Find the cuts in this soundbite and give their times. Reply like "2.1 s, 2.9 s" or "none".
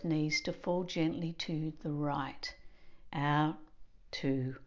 3.1 s